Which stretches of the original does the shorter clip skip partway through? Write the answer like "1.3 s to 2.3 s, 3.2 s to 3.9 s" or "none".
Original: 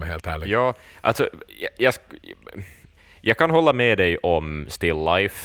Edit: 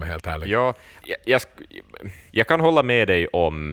1.0 s to 1.5 s, 2.8 s to 3.2 s